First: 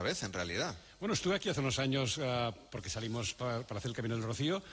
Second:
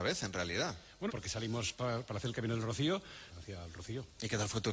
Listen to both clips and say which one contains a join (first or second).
second